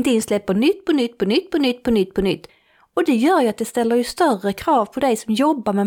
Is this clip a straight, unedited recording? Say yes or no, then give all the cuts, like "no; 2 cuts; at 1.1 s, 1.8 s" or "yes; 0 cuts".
yes; 0 cuts